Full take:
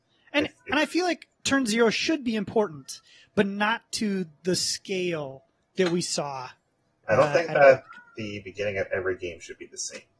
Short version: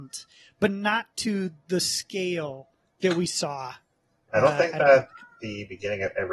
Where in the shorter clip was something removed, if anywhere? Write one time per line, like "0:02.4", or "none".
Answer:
none